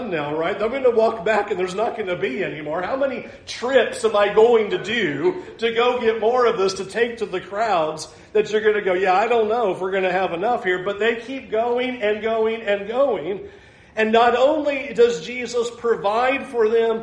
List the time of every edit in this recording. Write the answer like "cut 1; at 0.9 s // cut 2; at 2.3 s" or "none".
none